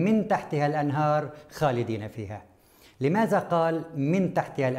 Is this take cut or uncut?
uncut